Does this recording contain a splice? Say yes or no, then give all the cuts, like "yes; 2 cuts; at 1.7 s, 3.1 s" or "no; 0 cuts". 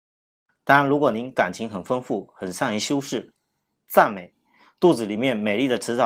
no; 0 cuts